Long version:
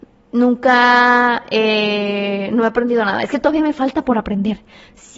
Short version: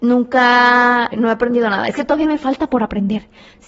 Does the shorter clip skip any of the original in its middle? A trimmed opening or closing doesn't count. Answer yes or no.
yes